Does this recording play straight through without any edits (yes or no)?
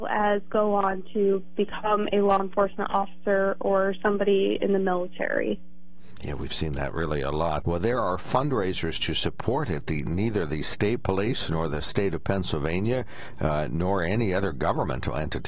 no